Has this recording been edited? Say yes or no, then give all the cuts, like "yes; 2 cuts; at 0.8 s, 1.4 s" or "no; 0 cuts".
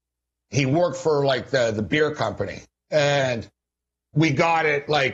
no; 0 cuts